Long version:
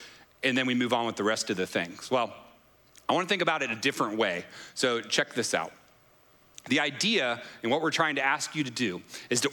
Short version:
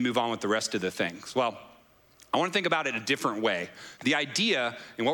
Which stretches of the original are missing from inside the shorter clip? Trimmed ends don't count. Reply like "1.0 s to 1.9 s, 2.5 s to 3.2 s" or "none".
4.7 s to 6.6 s